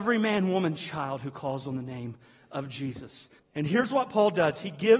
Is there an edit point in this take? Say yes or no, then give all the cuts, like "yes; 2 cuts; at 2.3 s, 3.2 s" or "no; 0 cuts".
yes; 1 cut; at 3.4 s